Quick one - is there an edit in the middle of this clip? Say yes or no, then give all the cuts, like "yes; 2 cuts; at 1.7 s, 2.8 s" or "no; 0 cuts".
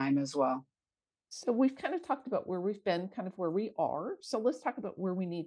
no; 0 cuts